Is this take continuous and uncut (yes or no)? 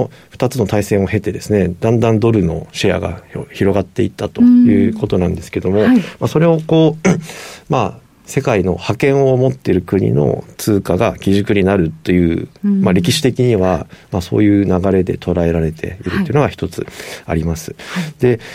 yes